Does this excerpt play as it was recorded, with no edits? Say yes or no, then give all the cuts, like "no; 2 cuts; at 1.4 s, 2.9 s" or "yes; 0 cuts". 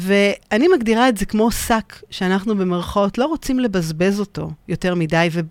yes; 0 cuts